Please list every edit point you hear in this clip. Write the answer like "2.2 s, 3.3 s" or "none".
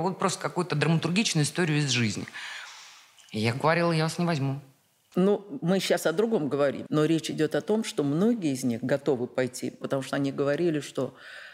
5.1 s, 6.9 s, 9.8 s